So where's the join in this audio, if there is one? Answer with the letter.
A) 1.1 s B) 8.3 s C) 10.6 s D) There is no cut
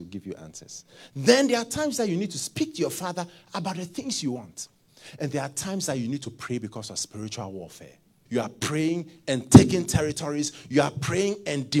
B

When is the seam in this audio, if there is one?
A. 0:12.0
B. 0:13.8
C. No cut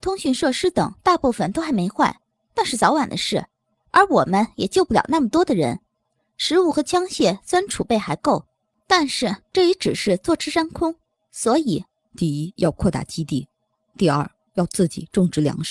A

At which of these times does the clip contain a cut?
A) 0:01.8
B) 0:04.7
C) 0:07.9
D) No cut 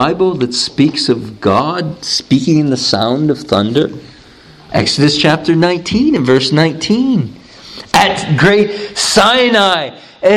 B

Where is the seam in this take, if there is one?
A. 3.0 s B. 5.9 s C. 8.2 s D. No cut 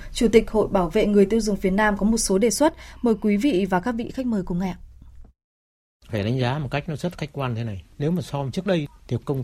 D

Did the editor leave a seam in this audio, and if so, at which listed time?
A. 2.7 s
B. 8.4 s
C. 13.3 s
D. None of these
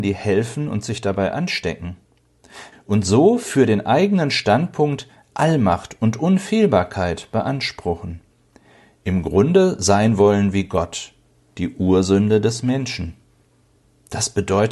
A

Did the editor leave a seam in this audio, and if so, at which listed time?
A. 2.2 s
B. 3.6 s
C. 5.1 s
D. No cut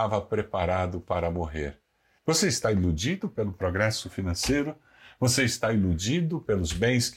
A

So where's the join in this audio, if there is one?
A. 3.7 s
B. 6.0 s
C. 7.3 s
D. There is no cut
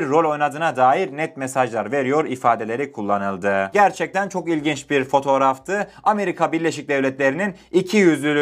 A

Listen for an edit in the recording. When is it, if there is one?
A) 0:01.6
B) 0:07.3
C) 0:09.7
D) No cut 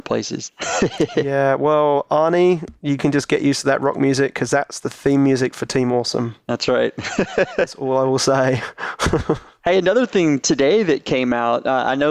D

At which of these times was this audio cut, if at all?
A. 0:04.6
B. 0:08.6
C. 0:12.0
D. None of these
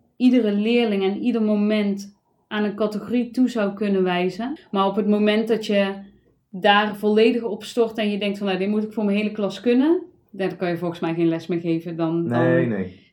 A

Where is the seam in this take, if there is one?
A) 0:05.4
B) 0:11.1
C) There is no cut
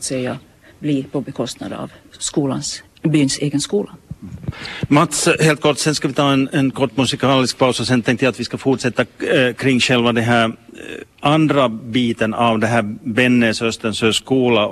B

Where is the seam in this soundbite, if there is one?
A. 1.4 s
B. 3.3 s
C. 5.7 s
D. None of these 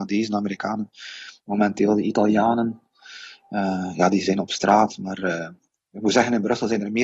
D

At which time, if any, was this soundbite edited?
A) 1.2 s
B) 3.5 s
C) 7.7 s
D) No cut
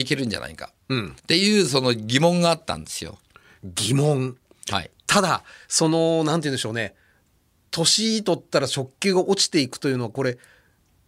A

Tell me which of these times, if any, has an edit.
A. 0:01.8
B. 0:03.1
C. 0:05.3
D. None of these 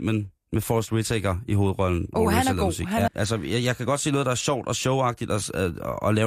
B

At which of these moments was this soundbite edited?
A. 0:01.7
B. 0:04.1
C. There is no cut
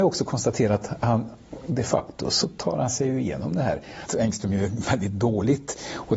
B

